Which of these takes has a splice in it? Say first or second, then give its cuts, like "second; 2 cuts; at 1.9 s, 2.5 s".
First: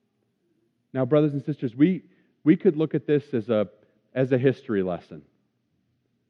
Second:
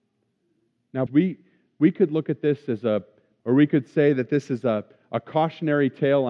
second; 2 cuts; at 1.1 s, 3.4 s